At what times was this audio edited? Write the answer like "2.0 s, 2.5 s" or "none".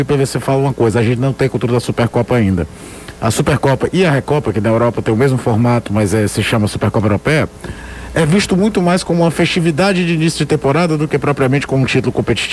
none